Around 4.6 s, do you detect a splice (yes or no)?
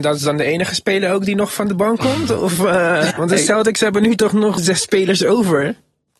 yes